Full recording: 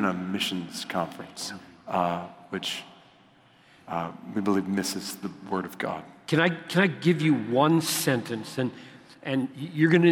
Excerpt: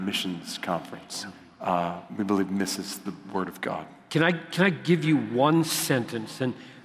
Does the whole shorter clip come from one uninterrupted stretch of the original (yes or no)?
no